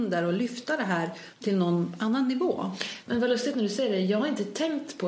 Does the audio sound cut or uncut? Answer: uncut